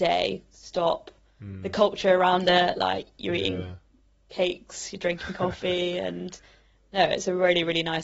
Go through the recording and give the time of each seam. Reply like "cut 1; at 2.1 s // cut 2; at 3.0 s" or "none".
none